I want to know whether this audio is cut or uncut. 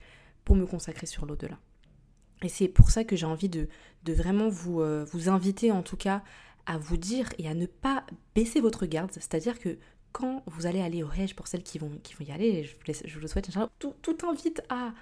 cut